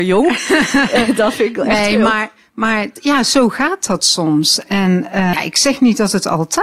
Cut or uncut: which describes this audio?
cut